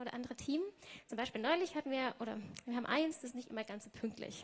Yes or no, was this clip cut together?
no